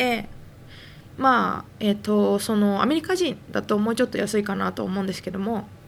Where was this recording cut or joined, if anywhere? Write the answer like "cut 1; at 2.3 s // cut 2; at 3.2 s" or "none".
cut 1; at 1.1 s